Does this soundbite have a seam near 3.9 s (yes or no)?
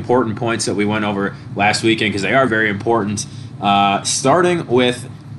no